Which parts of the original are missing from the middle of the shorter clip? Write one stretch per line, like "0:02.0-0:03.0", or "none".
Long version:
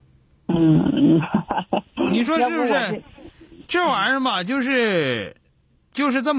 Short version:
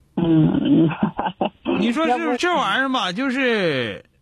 0:02.7-0:03.7